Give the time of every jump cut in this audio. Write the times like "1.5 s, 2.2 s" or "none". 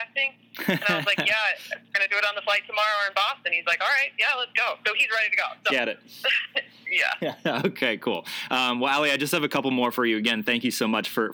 5.7 s